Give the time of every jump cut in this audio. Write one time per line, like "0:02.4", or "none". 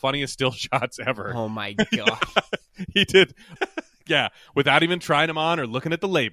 0:03.6